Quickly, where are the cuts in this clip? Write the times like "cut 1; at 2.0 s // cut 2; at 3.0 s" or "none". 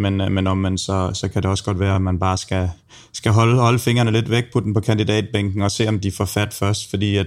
none

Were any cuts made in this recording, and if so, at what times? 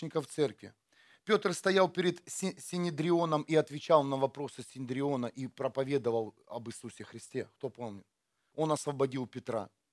cut 1; at 8.5 s

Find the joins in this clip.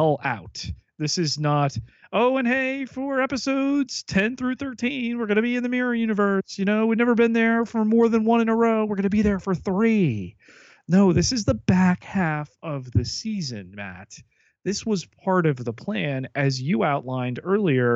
none

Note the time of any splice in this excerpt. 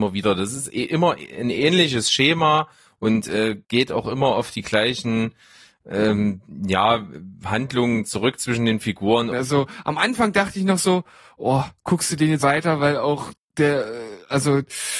cut 1; at 9.3 s // cut 2; at 12.4 s

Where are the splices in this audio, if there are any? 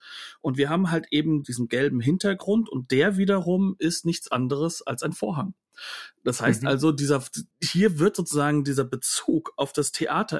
cut 1; at 1.4 s // cut 2; at 7.5 s

